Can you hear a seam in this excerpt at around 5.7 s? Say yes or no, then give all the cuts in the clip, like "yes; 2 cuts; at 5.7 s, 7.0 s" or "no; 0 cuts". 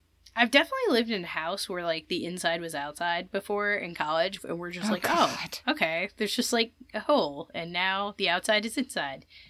no; 1 cut; at 4.4 s